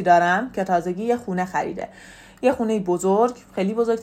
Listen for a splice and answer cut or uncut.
uncut